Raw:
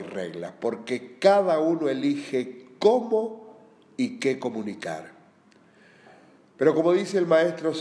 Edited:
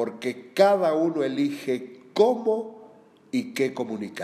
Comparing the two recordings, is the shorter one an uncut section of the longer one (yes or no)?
yes